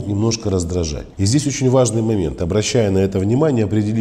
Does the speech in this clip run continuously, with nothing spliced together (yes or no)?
no